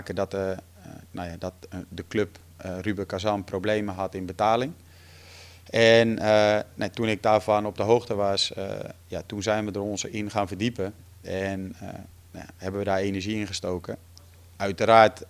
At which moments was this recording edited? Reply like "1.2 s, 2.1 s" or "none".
none